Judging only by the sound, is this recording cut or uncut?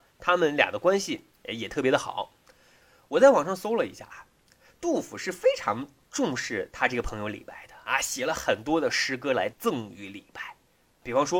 uncut